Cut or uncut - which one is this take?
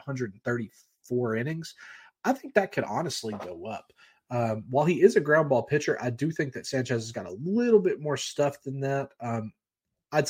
uncut